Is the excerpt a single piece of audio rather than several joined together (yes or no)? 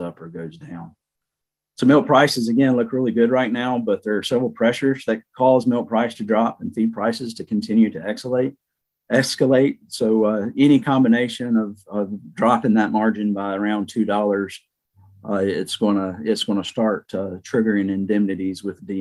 yes